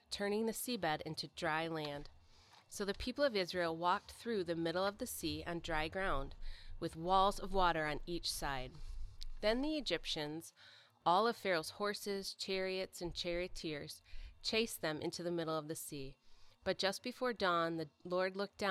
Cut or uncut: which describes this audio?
uncut